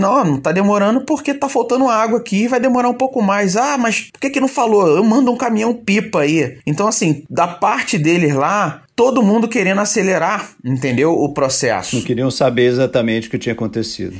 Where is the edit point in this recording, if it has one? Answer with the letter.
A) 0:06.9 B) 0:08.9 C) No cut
C